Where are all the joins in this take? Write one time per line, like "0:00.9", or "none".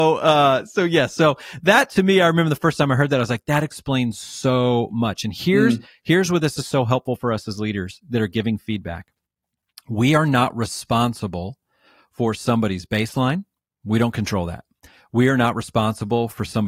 none